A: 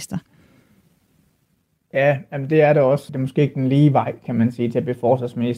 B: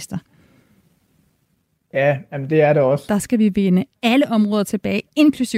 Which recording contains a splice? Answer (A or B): B